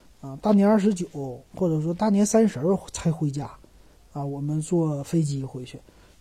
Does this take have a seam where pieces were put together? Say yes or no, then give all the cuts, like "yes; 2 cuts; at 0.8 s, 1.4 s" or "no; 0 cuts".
no; 0 cuts